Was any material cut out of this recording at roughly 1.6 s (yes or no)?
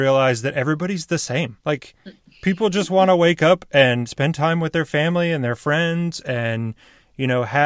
yes